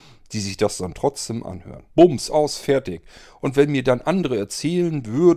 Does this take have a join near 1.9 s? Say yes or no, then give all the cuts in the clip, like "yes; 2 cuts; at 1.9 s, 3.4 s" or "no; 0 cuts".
yes; 1 cut; at 1.9 s